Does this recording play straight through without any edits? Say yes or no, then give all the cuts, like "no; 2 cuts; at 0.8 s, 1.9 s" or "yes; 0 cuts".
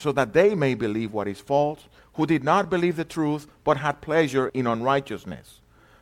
no; 2 cuts; at 2.0 s, 4.5 s